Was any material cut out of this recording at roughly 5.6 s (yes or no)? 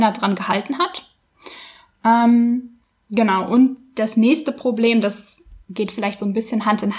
yes